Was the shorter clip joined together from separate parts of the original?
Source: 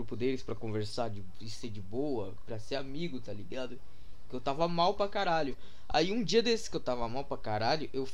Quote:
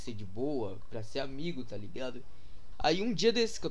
yes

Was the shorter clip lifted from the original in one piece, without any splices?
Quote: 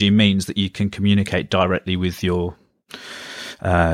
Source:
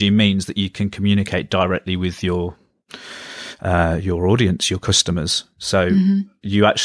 yes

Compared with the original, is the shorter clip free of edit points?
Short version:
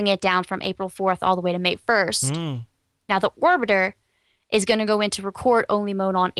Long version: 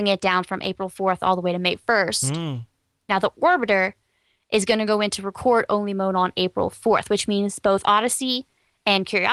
yes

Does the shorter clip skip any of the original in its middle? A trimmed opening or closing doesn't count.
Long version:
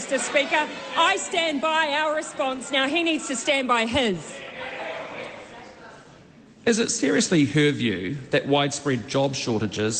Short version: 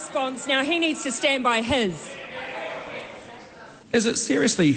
yes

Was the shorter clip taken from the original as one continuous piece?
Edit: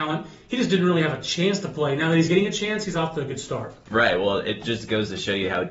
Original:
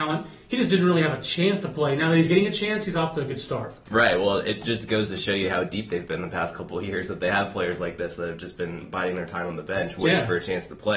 yes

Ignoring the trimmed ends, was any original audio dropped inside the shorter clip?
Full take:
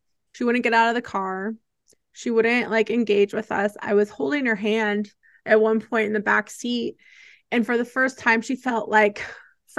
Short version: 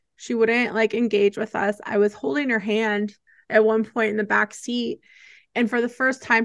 no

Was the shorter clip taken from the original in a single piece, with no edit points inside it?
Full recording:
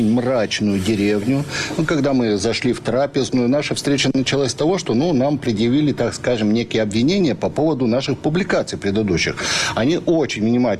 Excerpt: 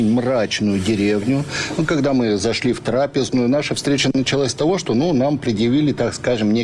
yes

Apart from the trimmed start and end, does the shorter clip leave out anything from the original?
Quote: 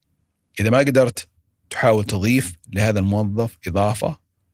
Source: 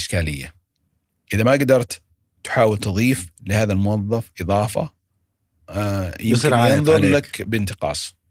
no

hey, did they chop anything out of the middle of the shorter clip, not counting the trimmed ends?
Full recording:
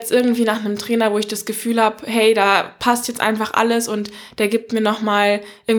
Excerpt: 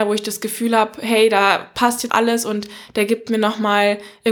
yes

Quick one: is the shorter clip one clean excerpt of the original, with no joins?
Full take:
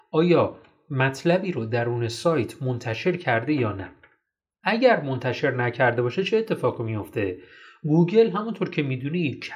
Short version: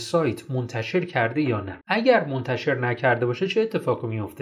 no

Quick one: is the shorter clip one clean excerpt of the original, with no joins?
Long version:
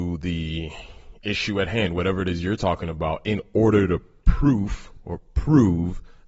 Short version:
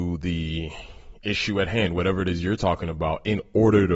yes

